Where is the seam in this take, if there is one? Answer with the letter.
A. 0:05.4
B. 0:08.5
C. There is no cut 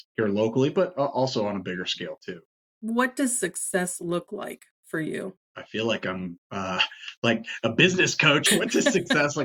B